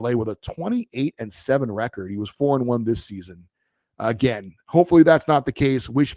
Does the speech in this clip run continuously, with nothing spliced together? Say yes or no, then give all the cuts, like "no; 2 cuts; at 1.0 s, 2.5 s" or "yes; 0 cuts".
yes; 0 cuts